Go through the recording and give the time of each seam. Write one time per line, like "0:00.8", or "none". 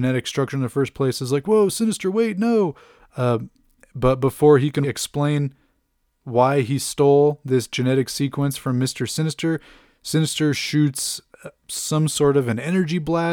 0:04.8